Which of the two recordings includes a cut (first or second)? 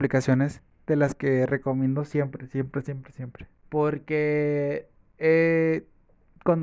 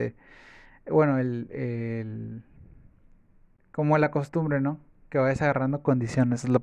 first